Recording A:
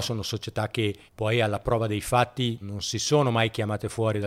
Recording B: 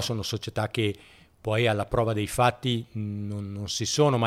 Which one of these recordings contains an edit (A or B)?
A